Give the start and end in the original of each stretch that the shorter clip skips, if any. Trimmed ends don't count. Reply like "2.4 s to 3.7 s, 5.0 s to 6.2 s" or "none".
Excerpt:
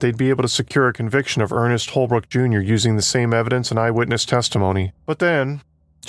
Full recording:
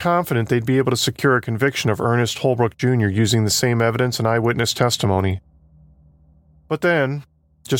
5.5 s to 6.6 s